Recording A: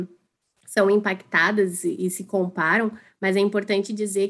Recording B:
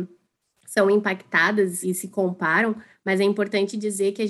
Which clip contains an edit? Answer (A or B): B